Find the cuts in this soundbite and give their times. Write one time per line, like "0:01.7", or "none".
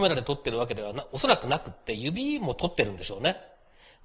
none